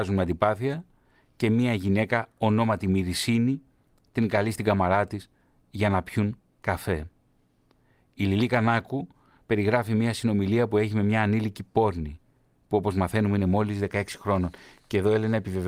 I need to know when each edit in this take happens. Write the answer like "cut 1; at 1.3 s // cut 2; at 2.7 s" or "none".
none